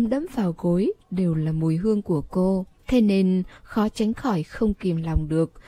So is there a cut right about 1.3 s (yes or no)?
no